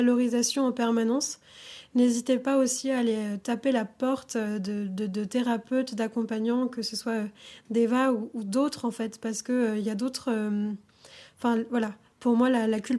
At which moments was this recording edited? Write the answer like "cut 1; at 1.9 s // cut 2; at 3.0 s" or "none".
none